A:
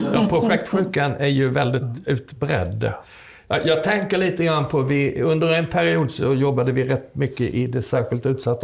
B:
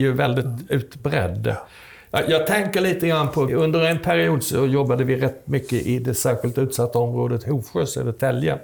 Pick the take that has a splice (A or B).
B